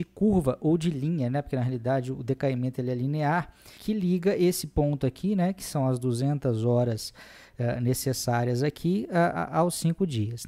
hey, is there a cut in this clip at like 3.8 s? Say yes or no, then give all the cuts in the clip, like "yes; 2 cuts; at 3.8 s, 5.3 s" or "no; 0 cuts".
yes; 1 cut; at 3.8 s